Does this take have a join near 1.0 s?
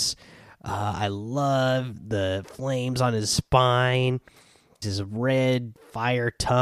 no; 1 cut; at 4.8 s

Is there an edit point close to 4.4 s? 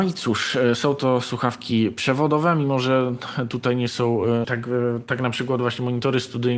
yes; 1 cut; at 4.4 s

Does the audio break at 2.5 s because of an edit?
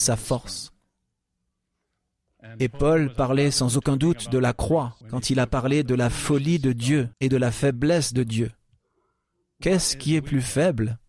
no; 2 cuts; at 5.0 s, 7.1 s

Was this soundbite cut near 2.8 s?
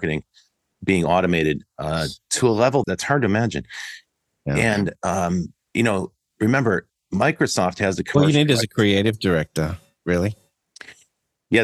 yes; 1 cut; at 2.8 s

